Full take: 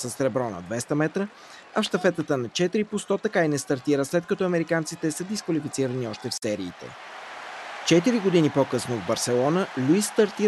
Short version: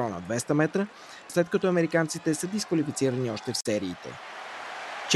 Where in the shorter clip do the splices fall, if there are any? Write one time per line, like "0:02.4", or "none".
0:01.3